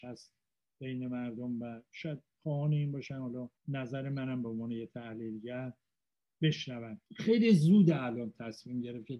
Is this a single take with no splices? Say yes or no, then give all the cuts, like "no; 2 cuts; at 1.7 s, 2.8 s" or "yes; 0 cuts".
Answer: no; 2 cuts; at 3.6 s, 7.1 s